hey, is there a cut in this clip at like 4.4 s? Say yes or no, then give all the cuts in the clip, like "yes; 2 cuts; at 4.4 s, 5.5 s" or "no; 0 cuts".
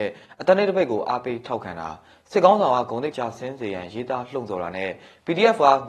no; 1 cut; at 3.1 s